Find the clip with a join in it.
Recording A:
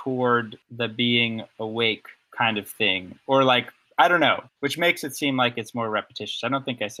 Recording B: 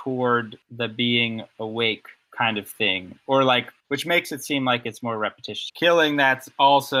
B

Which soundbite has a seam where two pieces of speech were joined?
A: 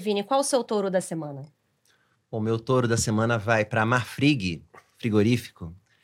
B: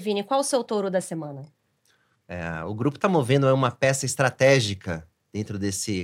B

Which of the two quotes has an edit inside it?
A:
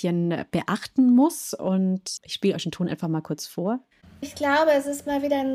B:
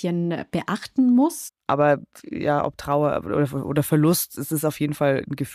B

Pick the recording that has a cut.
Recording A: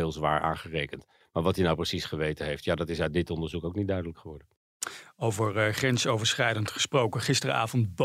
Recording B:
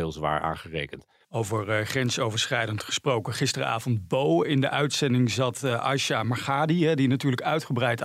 B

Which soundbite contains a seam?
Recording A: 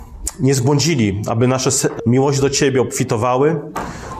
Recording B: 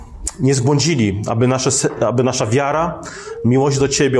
A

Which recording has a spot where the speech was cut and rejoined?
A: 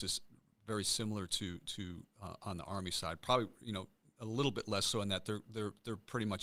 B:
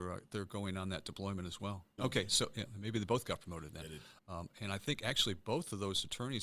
B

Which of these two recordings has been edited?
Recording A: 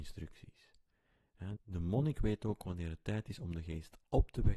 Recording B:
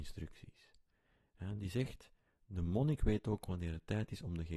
A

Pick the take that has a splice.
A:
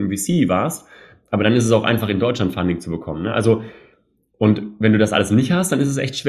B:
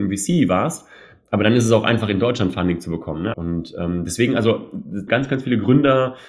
B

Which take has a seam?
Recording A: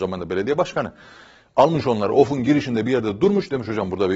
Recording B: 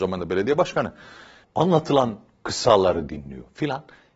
B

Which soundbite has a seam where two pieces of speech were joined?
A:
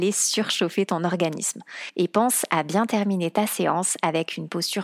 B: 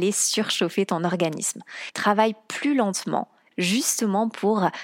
B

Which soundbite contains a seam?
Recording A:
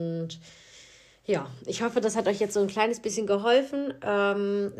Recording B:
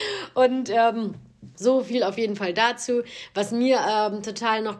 B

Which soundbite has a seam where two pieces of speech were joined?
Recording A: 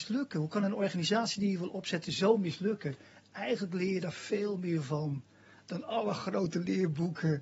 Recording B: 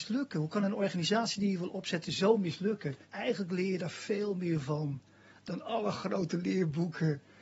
B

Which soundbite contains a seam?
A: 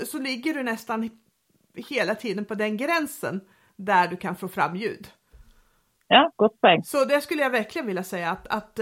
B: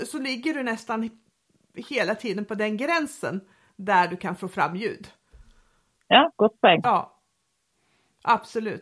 B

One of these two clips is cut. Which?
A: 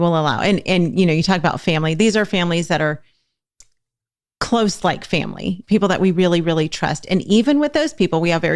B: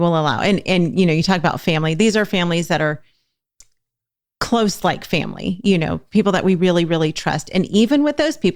A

